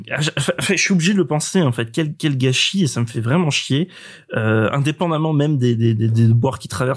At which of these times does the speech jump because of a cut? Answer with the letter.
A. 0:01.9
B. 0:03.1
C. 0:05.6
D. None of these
D